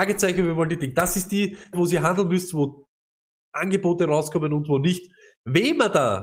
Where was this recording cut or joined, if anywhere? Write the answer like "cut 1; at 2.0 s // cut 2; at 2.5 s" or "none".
cut 1; at 1.7 s